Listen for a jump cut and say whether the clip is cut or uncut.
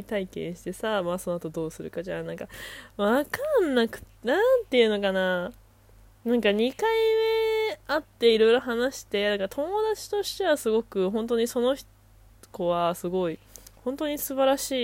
uncut